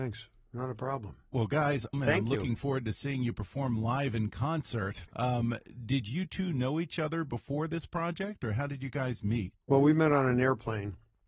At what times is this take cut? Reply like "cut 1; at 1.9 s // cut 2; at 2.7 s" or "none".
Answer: cut 1; at 1.9 s // cut 2; at 5.1 s // cut 3; at 9.6 s